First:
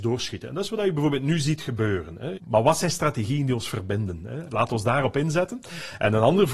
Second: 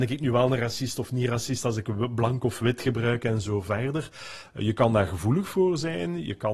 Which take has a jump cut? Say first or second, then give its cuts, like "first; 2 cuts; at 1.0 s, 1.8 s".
first; 1 cut; at 2.3 s